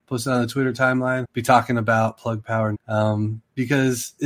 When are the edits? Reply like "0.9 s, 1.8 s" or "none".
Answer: 1.2 s, 2.7 s